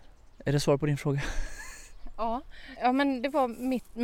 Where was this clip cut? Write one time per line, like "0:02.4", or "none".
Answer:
0:02.8